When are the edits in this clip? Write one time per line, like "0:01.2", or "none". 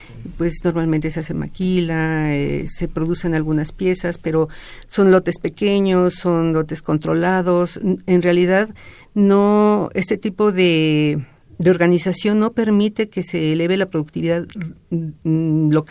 none